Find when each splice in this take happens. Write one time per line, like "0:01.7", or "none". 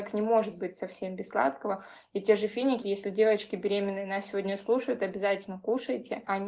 0:02.8